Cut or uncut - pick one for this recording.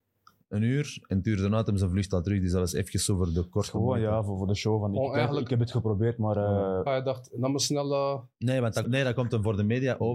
cut